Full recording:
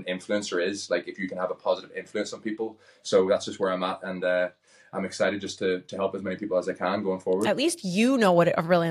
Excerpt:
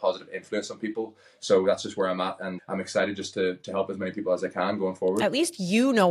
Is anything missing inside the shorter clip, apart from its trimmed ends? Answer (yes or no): yes